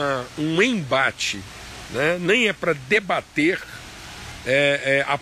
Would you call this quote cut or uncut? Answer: uncut